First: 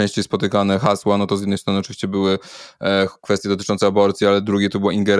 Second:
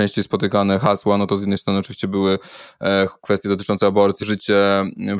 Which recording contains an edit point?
second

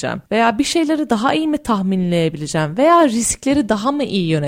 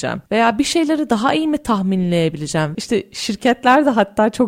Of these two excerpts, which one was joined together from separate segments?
second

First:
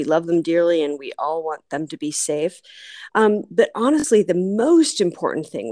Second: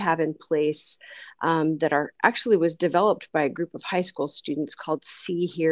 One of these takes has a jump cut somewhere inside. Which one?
first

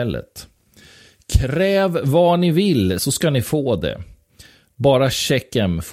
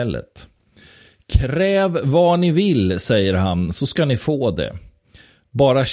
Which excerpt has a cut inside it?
first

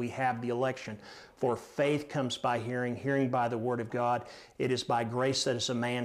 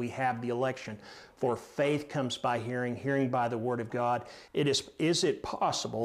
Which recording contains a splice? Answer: second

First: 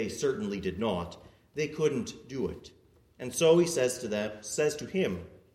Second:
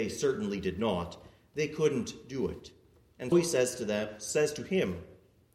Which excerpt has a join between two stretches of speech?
second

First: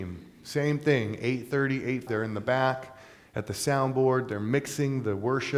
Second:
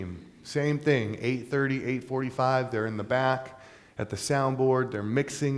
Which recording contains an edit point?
first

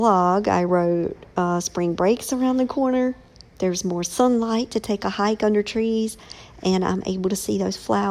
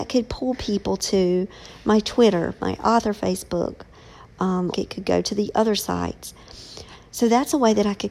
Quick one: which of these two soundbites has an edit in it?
second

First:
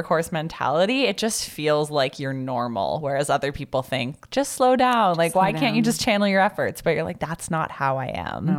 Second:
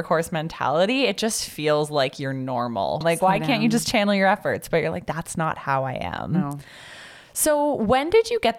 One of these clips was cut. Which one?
second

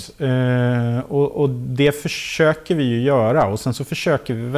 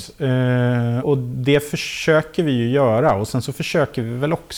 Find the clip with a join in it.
second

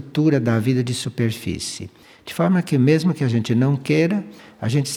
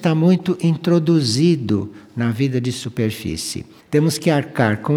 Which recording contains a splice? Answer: second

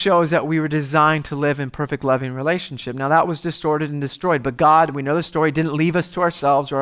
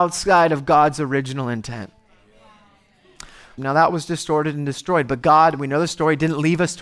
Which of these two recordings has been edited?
second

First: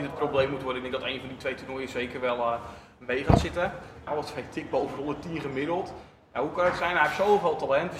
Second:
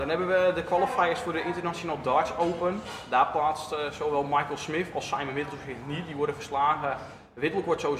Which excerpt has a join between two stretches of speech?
first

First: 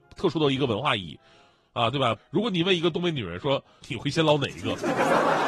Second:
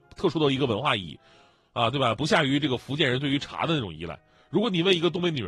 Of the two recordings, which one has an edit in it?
first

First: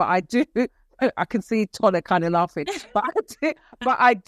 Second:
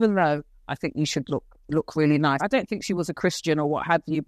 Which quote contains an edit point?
second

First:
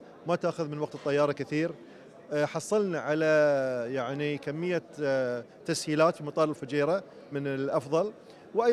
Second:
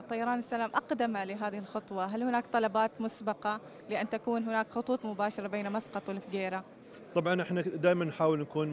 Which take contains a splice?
first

